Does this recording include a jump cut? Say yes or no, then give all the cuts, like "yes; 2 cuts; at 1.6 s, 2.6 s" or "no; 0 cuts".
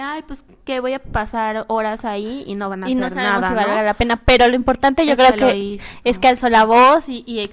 no; 0 cuts